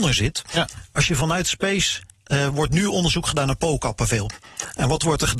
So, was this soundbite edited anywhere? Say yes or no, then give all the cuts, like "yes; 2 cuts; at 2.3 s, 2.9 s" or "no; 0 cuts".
no; 0 cuts